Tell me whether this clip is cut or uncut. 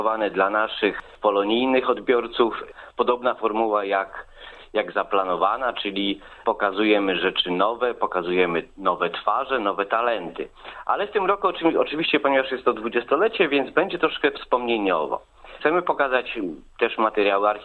uncut